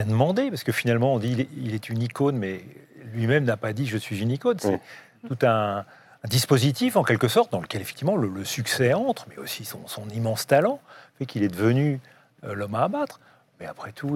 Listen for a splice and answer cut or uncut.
uncut